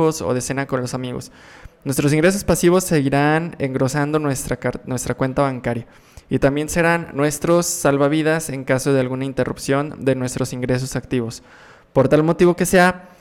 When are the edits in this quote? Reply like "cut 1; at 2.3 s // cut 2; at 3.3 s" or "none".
none

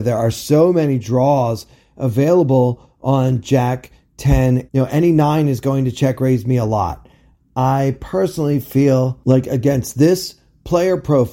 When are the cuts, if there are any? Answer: cut 1; at 4.7 s // cut 2; at 7.3 s

